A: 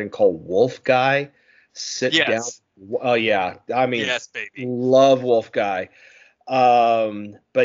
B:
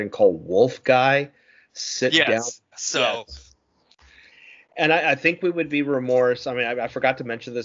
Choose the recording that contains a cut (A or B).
B